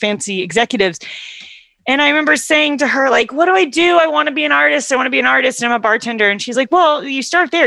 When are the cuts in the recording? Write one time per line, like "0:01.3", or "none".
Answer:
none